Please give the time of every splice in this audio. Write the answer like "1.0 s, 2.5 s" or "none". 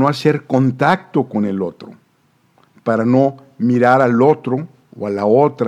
none